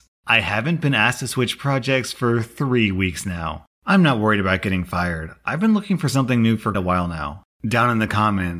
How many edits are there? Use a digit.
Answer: 1